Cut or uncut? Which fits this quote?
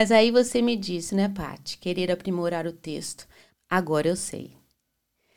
cut